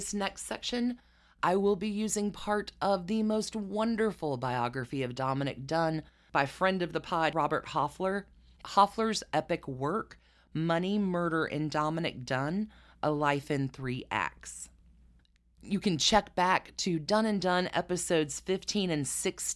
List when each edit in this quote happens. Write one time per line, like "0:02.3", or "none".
none

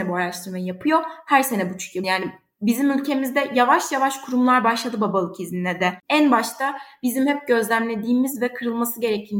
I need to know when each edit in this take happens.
0:02.0
0:06.0

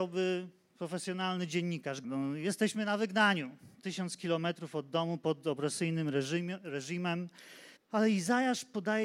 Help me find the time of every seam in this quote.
0:02.0
0:07.8

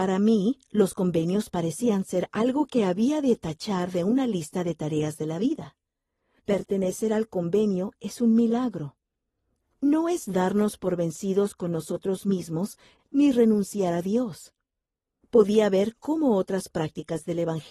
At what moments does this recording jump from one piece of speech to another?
0:06.4
0:13.0
0:15.2

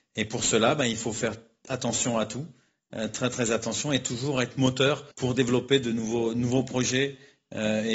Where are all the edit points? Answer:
0:05.1

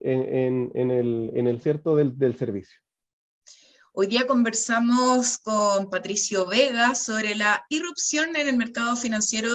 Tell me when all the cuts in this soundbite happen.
0:01.6

